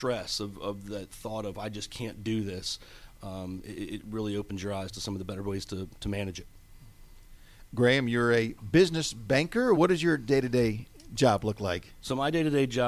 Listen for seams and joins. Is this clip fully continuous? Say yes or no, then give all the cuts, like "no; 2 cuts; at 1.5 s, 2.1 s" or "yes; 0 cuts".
yes; 0 cuts